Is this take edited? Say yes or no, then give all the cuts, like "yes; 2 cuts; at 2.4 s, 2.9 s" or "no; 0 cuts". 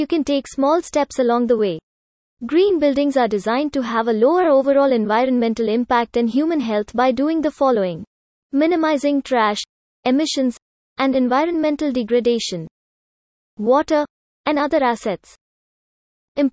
yes; 1 cut; at 13.4 s